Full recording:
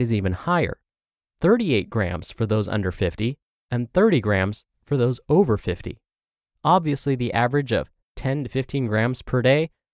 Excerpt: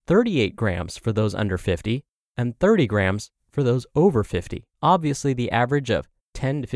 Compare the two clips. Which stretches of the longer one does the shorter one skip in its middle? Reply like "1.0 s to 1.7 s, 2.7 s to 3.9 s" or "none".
6.1 s to 6.5 s